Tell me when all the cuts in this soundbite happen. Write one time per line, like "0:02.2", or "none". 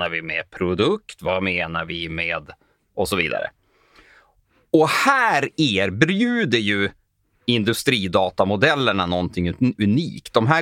none